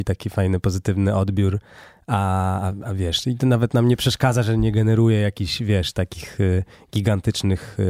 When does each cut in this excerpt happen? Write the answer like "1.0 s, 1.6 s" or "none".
none